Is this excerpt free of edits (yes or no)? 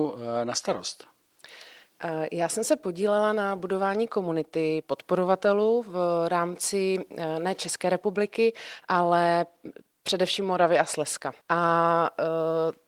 no